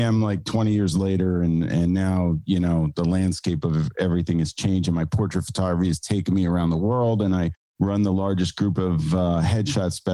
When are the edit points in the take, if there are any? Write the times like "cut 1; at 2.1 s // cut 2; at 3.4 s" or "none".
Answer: none

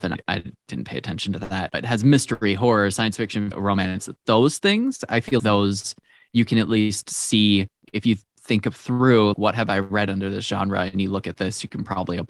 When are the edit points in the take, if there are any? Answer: cut 1; at 3.5 s // cut 2; at 5.4 s // cut 3; at 9.3 s

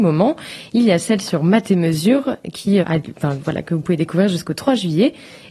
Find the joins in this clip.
cut 1; at 2.8 s

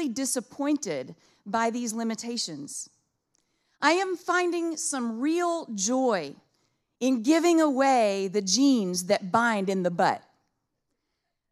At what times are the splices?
none

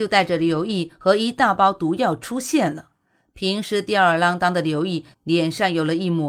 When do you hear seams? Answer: cut 1; at 5.1 s

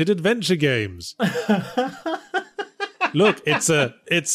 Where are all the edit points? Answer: none

